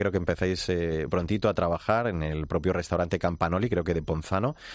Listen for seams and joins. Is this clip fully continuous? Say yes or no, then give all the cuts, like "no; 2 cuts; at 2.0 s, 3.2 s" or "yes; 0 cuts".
no; 1 cut; at 1.1 s